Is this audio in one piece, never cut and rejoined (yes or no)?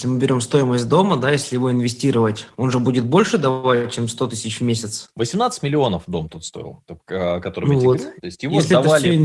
yes